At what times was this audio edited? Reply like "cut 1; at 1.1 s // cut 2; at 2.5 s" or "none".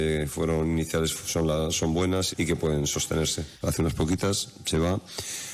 cut 1; at 2.3 s // cut 2; at 3.6 s